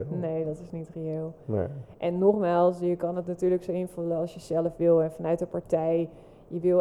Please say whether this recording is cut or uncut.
uncut